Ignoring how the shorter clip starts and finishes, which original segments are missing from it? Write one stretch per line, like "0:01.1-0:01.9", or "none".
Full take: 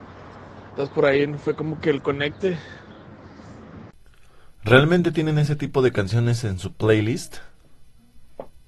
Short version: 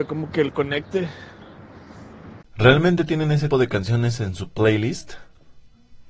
0:03.9-0:04.5
0:05.6-0:05.7